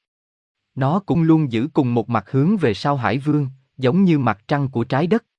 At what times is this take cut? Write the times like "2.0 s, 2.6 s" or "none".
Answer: 1.1 s